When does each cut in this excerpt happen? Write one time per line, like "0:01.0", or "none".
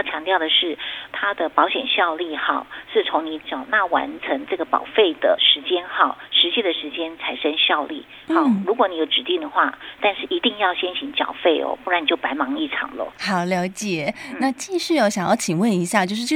0:10.0